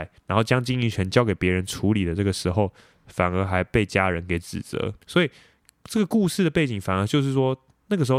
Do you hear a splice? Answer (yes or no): yes